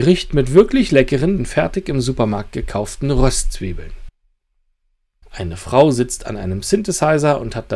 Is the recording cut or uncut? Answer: cut